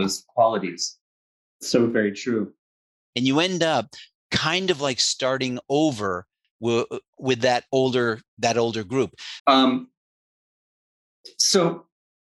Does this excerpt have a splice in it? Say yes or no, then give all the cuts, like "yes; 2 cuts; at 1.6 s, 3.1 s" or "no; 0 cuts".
yes; 3 cuts; at 1.4 s, 3.1 s, 9.4 s